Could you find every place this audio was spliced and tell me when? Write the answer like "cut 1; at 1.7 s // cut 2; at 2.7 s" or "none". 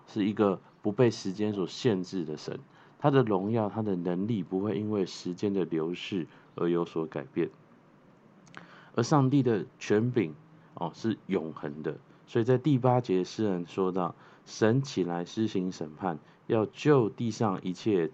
none